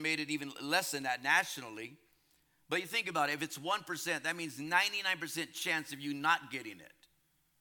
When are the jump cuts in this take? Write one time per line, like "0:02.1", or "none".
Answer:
none